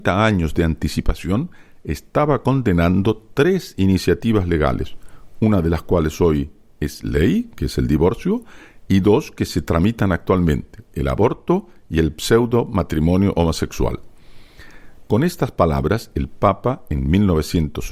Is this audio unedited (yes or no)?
no